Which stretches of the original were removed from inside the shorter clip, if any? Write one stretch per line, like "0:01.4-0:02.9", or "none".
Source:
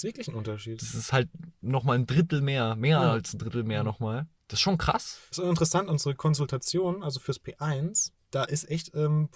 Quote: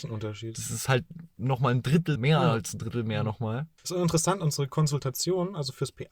0:02.4-0:02.8
0:04.4-0:05.3